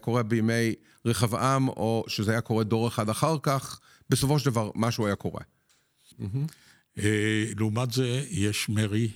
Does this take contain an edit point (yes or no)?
yes